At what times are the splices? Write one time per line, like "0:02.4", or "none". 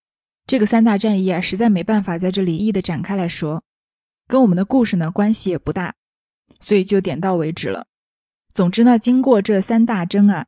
0:02.6

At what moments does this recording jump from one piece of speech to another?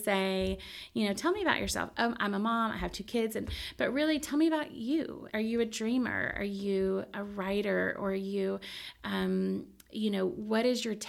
0:05.3

